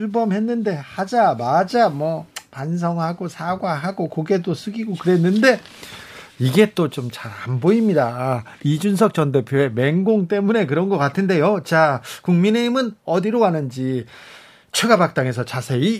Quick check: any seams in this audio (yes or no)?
no